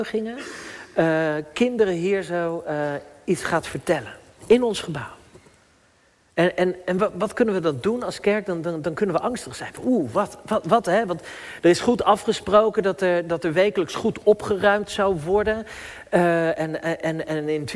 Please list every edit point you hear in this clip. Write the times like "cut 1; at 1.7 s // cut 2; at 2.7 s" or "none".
none